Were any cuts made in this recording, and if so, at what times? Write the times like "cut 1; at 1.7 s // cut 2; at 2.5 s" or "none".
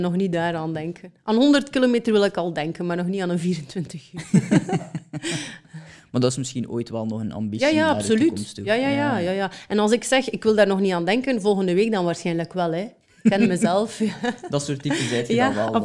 none